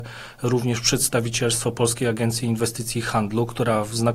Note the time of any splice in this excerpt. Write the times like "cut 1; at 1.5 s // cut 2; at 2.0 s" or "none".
none